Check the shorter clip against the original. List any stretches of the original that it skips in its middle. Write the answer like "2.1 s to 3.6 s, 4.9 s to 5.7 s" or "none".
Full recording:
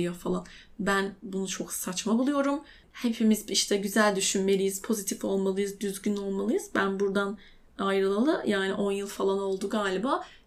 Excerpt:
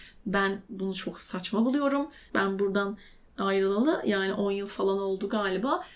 2.8 s to 6.7 s